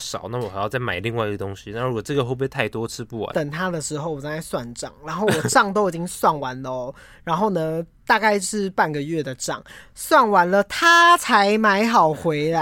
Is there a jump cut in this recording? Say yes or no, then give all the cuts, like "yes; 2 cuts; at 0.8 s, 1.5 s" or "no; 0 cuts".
yes; 1 cut; at 3.3 s